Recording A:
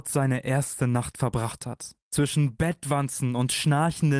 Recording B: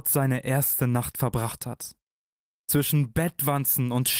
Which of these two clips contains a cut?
A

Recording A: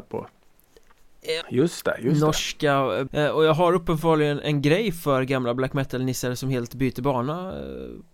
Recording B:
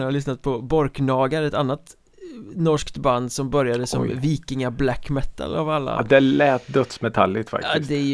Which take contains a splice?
A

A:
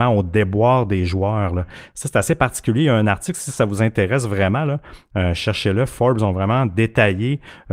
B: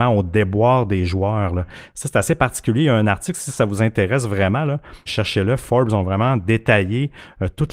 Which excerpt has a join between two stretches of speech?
B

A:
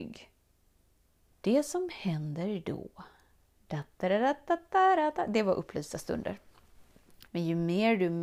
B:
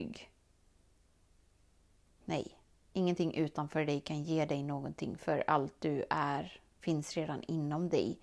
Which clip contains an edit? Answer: A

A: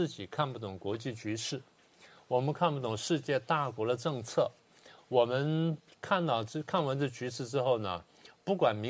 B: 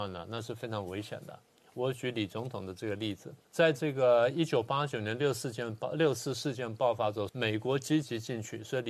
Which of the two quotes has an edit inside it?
B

